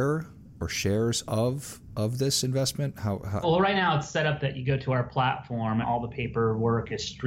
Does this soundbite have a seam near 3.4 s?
yes; 2 cuts; at 3.4 s, 5.8 s

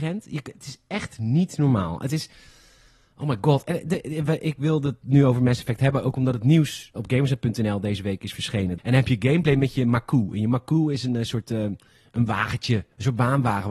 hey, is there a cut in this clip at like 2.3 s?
no; 2 cuts; at 7.0 s, 8.8 s

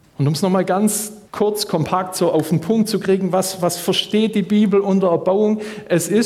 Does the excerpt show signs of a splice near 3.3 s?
no; 1 cut; at 1.3 s

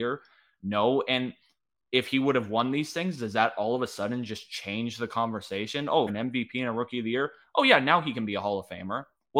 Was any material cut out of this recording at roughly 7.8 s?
no; 1 cut; at 6.1 s

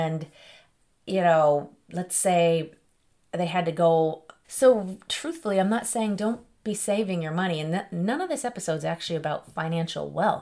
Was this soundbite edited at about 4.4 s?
yes; 1 cut; at 4.4 s

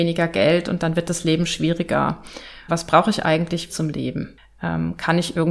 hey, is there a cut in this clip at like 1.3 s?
no; 2 cuts; at 2.7 s, 3.7 s

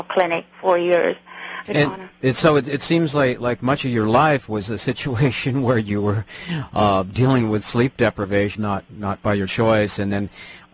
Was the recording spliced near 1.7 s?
yes; 2 cuts; at 1.7 s, 8.5 s

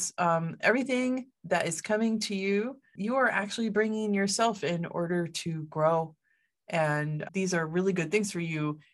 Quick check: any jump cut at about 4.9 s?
no; 2 cuts; at 3.0 s, 7.3 s

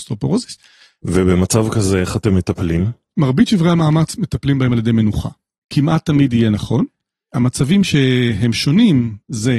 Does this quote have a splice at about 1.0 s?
yes; 1 cut; at 1.0 s

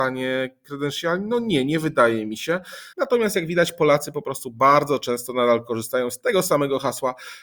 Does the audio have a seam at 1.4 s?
no; 1 cut; at 2.9 s

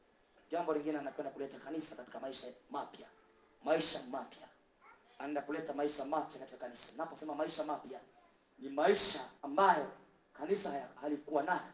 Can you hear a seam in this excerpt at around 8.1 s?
no; 1 cut; at 9.4 s

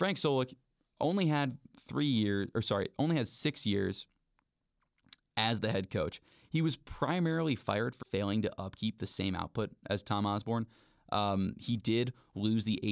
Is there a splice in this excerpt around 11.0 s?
no; 1 cut; at 8.0 s

